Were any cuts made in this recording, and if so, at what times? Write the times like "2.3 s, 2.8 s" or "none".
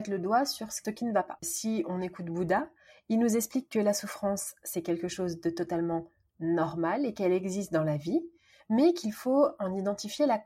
none